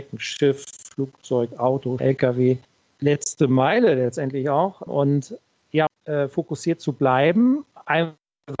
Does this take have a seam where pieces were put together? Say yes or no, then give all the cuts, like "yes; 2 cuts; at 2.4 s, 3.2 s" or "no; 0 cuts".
yes; 3 cuts; at 2.0 s, 4.9 s, 5.9 s